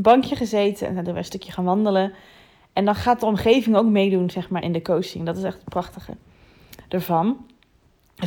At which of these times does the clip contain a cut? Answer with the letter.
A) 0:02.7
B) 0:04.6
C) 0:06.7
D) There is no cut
B